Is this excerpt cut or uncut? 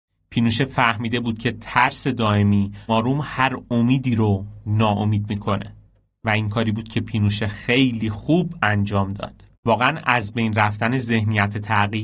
cut